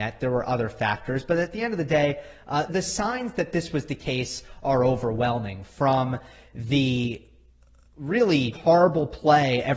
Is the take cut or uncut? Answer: cut